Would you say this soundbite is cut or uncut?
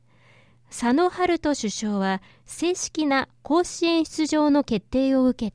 uncut